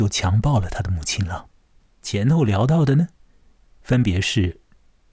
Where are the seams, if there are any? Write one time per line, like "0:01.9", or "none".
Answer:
0:01.9